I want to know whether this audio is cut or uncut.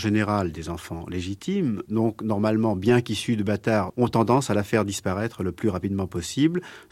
cut